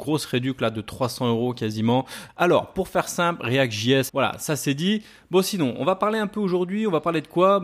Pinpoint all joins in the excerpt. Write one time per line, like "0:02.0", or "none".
0:02.3
0:04.1